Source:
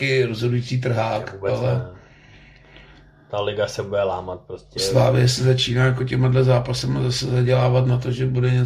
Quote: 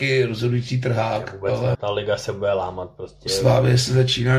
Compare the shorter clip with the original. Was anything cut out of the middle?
yes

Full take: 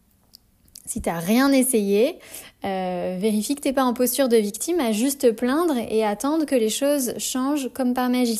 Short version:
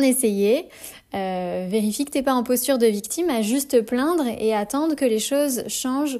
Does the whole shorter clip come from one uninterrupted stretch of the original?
yes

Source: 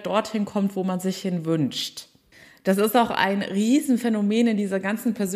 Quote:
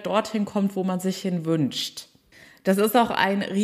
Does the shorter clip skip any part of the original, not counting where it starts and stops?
no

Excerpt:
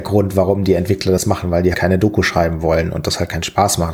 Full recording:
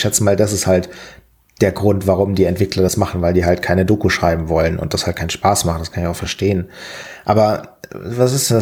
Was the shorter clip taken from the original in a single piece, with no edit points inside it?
no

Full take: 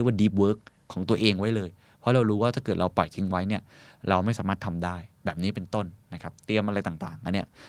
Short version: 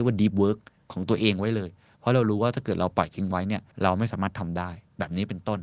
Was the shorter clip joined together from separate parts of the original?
yes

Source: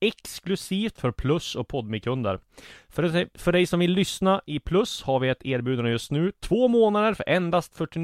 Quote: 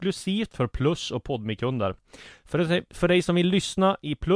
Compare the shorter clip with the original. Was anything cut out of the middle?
no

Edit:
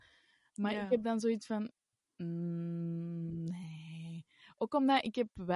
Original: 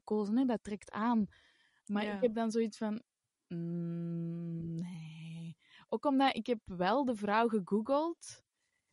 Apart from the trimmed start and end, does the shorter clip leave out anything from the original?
no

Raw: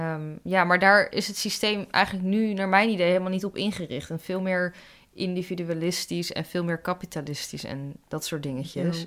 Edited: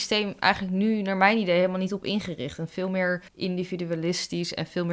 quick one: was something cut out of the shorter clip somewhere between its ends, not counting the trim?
yes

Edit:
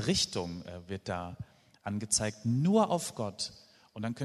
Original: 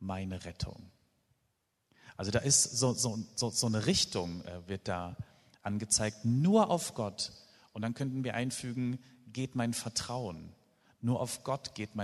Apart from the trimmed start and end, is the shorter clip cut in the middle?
no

